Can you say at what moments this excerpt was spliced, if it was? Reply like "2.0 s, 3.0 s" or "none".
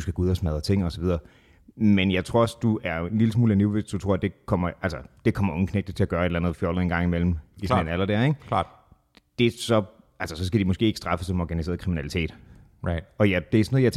none